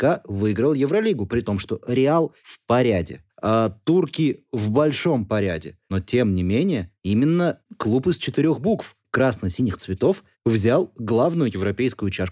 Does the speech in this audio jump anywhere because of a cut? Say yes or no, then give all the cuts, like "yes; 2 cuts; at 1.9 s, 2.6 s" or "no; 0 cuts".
no; 0 cuts